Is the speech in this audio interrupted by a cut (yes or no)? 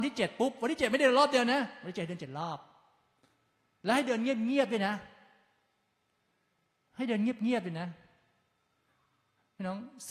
no